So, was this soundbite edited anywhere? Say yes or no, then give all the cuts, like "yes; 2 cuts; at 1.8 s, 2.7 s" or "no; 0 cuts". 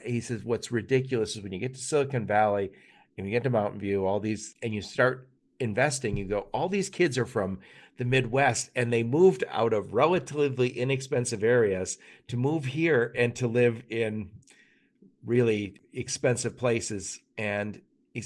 no; 0 cuts